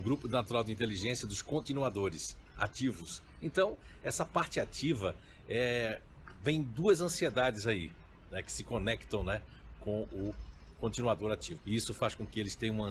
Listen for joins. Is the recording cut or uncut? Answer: cut